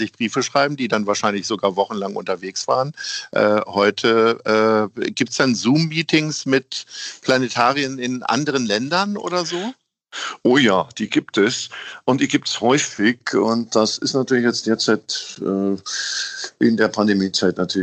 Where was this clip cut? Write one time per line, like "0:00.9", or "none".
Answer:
none